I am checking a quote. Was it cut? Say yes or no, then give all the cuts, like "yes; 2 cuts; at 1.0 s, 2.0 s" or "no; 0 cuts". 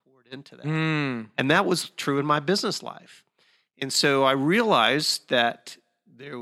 no; 0 cuts